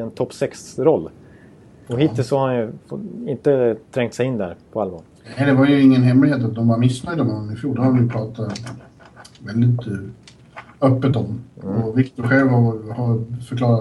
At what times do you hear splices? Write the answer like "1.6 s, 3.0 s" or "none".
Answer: none